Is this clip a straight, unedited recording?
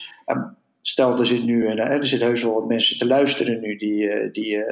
yes; 0 cuts

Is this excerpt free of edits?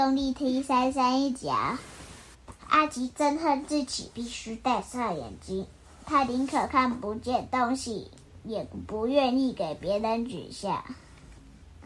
no; 1 cut; at 2.3 s

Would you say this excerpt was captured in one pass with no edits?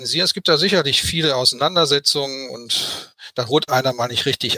yes; 0 cuts

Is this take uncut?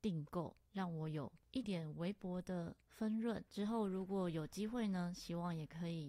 no; 2 cuts; at 1.6 s, 3.5 s

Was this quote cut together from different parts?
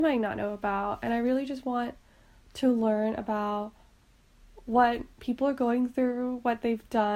no; 0 cuts

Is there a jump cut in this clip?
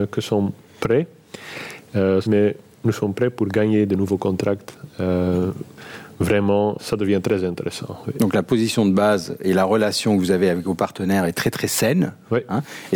yes; 2 cuts; at 2.2 s, 6.8 s

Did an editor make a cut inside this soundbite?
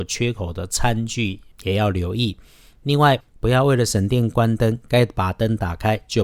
yes; 1 cut; at 3.2 s

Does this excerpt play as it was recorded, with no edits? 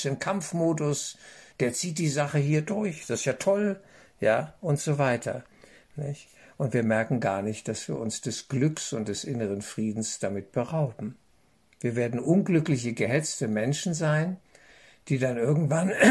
yes; 0 cuts

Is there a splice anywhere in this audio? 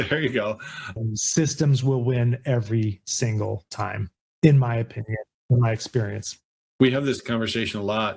yes; 1 cut; at 1.0 s

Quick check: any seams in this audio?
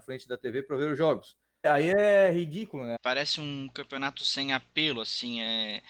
yes; 2 cuts; at 1.6 s, 3.0 s

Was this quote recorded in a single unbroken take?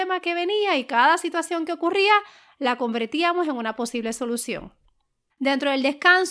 no; 1 cut; at 5.3 s

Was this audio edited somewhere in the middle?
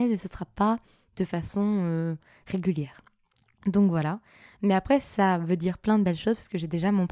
no; 0 cuts

